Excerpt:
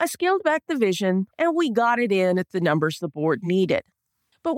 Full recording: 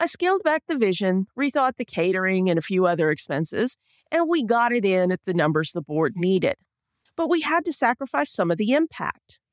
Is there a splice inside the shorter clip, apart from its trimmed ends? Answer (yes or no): yes